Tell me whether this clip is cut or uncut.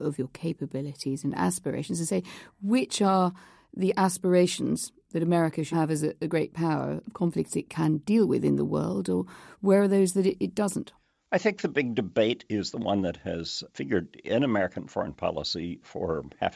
cut